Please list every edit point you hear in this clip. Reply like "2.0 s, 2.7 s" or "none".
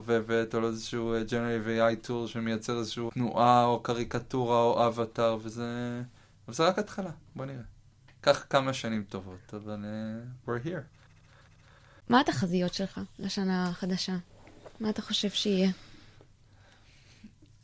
3.1 s